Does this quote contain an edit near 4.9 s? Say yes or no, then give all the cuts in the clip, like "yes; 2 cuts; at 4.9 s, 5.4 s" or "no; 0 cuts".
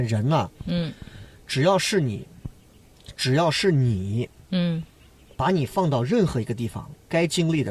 no; 0 cuts